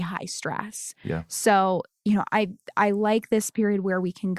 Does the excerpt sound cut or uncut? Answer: uncut